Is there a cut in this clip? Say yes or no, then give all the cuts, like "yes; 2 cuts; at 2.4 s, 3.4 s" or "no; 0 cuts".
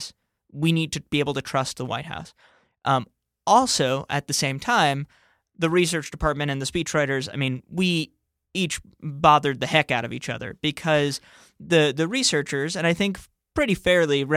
no; 0 cuts